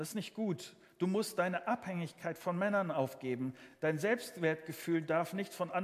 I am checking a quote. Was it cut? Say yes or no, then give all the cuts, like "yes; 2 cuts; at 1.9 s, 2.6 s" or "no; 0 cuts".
no; 0 cuts